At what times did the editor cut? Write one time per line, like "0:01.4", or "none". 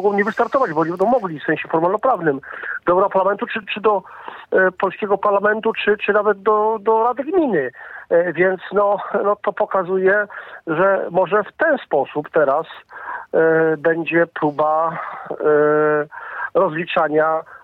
none

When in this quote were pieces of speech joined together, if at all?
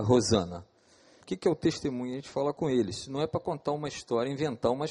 0:01.2

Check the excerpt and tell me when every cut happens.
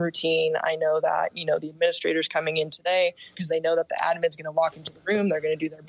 0:03.3

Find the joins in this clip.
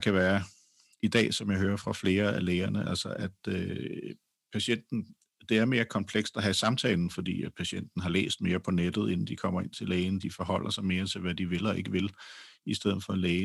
0:10.2

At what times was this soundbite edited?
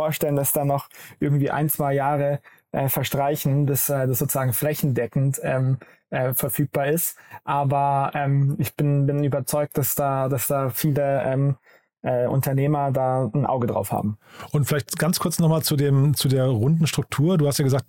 none

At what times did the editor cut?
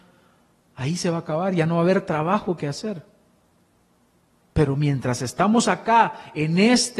none

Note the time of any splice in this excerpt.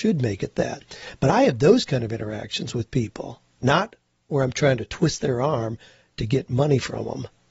none

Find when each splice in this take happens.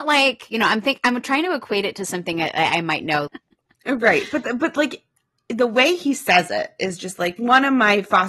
0:03.3

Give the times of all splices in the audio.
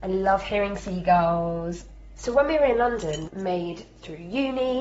0:02.2
0:03.3

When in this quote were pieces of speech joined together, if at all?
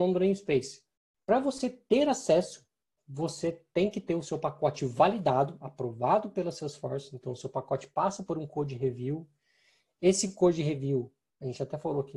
0:01.2

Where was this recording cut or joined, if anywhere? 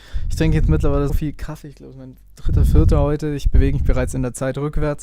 0:01.1

